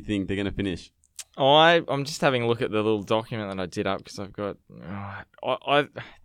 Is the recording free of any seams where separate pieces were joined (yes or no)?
yes